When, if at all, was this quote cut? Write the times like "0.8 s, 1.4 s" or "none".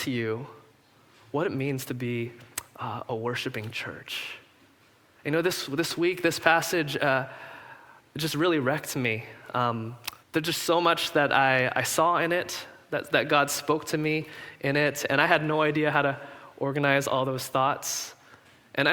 10.2 s